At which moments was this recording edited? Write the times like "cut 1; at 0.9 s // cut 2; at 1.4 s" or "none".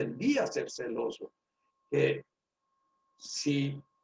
cut 1; at 1.7 s